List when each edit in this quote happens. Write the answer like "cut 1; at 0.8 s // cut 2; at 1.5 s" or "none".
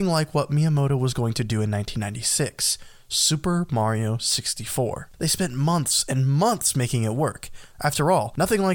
cut 1; at 5.1 s